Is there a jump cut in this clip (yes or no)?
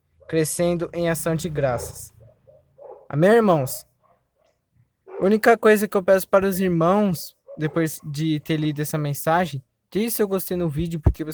no